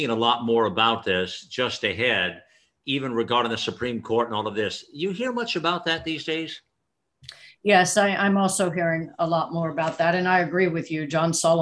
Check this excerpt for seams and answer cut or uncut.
uncut